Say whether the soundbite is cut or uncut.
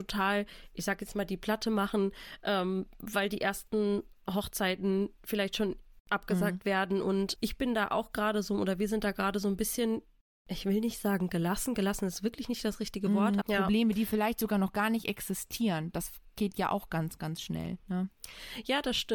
cut